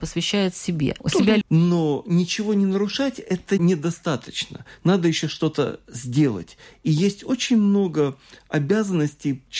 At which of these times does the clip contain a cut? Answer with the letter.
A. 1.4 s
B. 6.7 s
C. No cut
A